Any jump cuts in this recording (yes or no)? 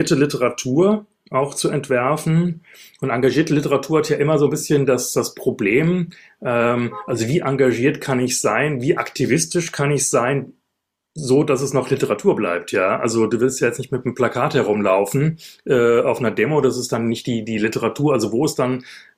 no